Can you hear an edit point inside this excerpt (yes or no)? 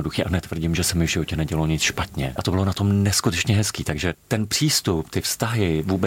yes